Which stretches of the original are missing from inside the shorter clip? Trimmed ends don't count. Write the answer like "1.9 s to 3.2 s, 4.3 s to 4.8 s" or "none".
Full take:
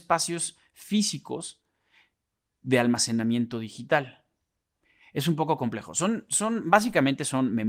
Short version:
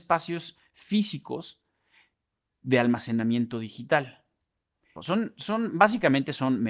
5.0 s to 5.9 s